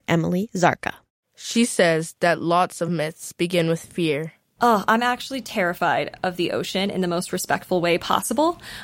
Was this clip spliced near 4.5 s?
no; 0 cuts

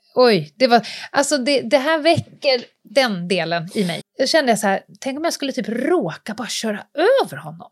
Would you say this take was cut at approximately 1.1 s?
no; 1 cut; at 4.0 s

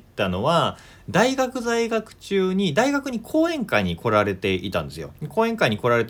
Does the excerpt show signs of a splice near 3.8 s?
no; 1 cut; at 5.2 s

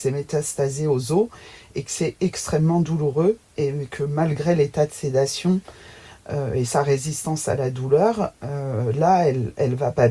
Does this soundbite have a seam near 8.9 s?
no; 0 cuts

